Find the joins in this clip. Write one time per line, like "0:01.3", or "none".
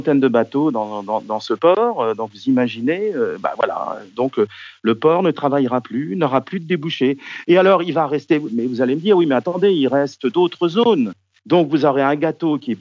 0:11.4